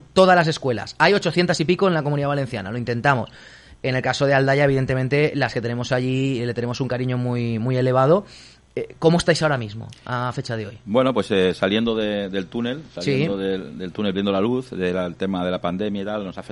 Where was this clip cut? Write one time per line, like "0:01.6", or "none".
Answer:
none